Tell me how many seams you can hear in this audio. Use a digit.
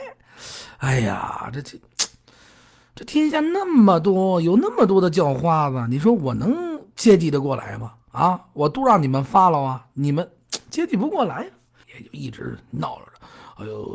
1